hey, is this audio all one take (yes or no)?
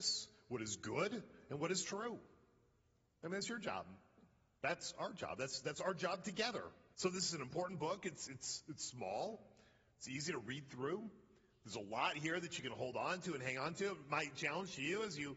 no